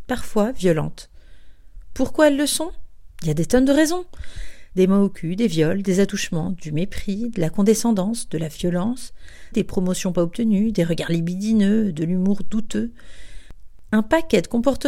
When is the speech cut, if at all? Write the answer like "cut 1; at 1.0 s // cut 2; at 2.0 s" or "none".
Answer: cut 1; at 4.7 s // cut 2; at 9.5 s